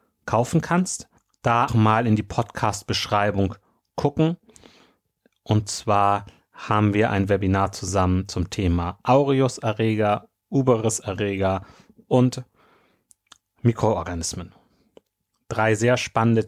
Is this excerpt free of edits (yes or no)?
no